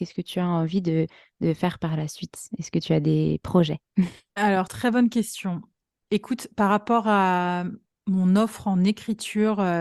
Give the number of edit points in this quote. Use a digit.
0